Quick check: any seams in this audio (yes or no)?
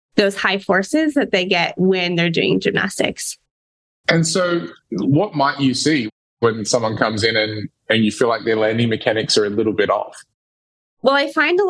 no